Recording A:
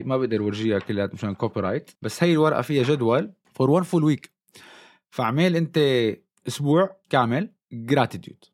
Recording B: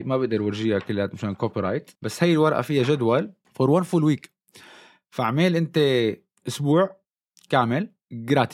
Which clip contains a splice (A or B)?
A